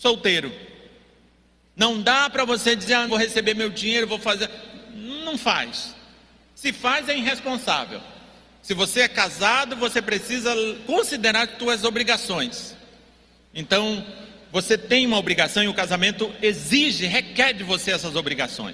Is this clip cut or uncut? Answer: cut